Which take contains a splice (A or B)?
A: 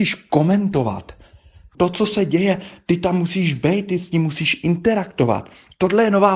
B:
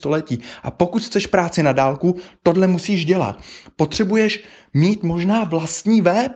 A